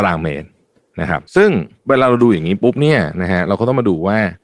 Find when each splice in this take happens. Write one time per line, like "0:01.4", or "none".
0:01.3